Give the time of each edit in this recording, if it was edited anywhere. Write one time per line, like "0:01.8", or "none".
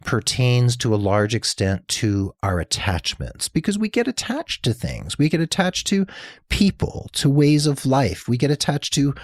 none